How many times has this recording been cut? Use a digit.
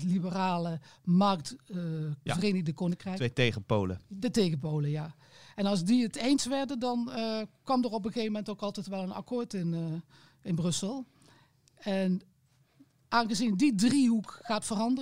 1